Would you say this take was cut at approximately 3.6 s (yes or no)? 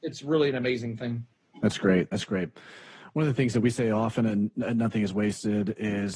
no